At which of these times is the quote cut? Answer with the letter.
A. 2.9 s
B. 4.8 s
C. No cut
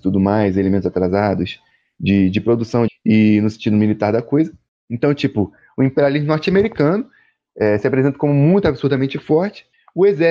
A